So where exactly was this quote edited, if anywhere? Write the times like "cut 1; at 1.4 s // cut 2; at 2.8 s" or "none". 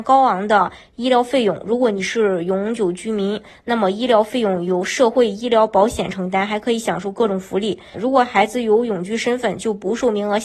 cut 1; at 7.9 s